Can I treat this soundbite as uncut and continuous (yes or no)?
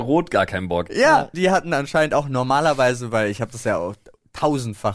no